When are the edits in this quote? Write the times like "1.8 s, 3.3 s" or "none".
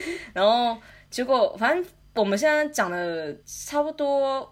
3.4 s